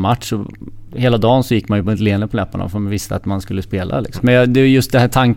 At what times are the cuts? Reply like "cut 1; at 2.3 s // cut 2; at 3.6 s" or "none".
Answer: cut 1; at 4.2 s